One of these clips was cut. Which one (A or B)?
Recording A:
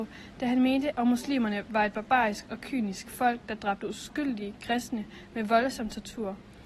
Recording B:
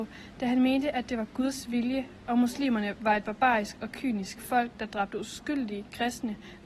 A